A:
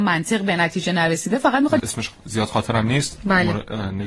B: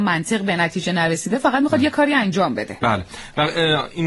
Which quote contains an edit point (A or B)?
A